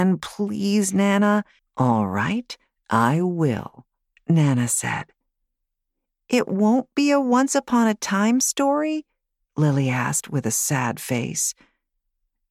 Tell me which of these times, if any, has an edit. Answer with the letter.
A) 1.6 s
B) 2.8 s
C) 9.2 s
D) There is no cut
A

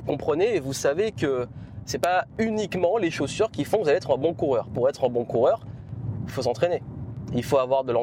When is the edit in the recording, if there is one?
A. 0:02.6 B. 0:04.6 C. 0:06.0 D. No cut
D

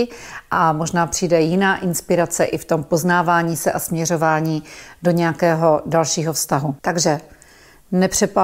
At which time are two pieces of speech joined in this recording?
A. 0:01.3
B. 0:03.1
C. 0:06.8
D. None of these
C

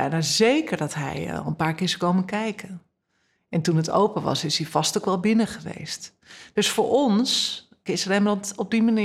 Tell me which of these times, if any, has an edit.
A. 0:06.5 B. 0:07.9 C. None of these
B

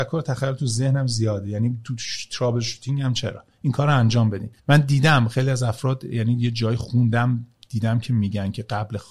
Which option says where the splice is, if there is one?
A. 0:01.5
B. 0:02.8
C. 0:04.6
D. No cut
C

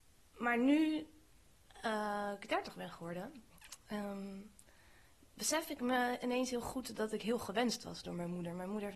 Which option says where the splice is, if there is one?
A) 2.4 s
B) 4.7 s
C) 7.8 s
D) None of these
D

